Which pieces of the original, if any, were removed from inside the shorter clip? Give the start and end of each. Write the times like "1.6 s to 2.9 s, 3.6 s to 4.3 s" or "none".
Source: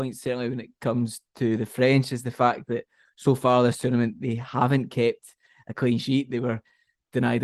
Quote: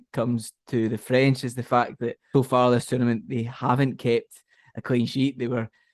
3.0 s to 3.3 s